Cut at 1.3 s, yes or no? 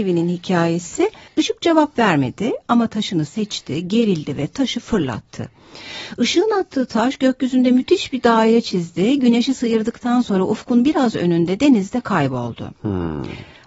yes